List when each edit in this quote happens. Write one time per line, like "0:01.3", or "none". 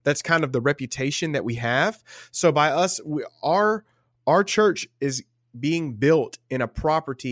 none